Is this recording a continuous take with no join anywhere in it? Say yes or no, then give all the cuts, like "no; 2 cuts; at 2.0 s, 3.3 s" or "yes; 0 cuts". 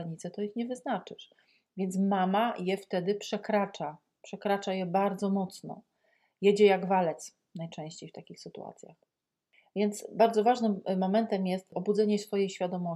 yes; 0 cuts